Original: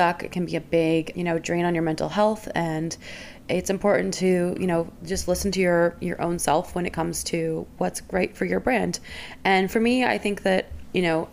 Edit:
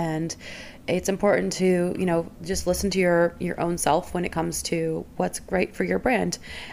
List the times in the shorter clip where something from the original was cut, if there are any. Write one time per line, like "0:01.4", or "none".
none

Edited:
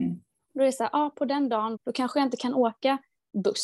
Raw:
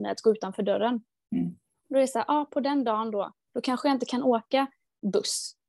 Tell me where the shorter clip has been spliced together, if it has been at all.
0:01.8

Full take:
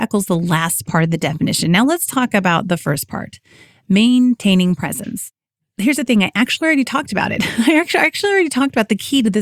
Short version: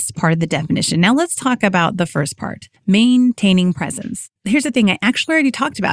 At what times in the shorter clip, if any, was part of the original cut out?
0:02.8
0:04.4

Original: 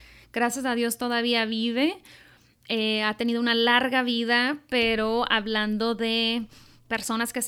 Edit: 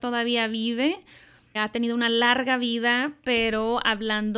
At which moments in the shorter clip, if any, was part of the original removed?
0:01.5

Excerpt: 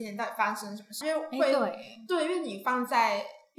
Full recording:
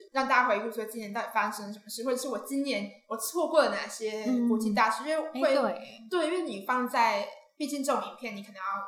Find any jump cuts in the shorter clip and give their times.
0:01.0

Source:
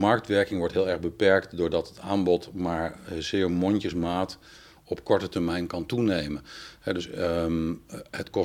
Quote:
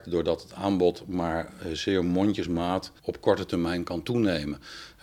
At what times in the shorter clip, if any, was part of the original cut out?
0:03.0

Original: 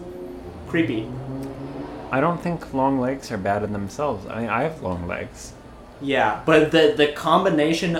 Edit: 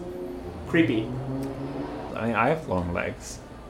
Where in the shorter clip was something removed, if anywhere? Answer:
0:02.1

